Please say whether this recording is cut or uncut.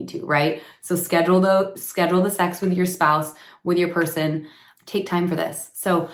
uncut